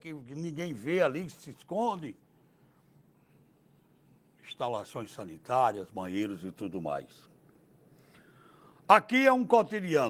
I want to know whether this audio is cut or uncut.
uncut